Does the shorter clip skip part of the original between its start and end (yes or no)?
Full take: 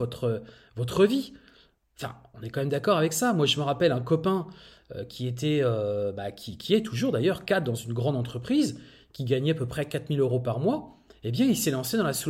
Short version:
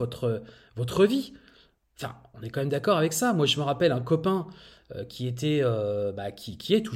no